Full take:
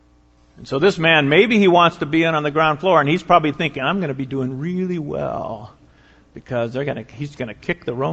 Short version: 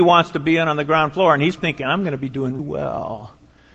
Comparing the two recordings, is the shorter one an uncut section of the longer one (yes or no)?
no